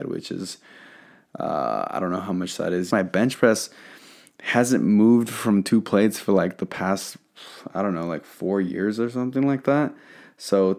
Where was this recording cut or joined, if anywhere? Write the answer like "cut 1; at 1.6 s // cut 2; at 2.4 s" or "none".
cut 1; at 2.9 s